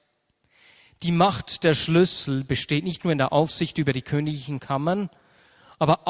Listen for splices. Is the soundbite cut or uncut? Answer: uncut